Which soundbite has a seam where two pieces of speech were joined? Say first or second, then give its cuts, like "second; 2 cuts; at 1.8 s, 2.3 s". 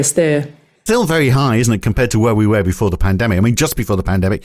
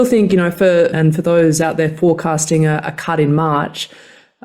second; 1 cut; at 0.9 s